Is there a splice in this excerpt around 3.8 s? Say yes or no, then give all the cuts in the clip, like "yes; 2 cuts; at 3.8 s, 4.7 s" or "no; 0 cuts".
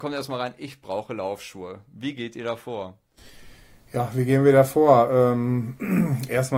no; 0 cuts